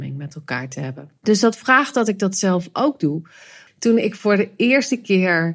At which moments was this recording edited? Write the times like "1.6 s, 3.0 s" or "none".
1.2 s, 3.7 s